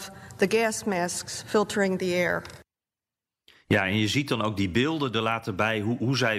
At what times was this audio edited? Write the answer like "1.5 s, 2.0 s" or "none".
none